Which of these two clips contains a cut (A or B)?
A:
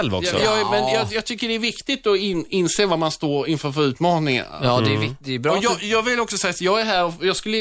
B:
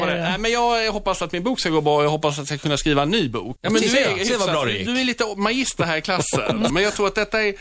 B